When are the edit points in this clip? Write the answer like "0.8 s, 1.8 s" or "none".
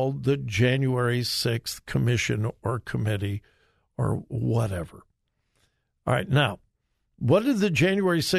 none